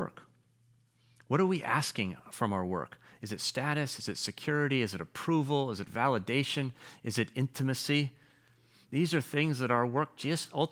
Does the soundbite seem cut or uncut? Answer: uncut